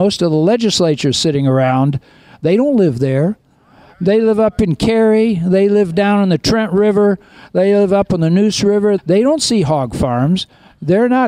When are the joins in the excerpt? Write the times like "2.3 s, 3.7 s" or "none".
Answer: 9.0 s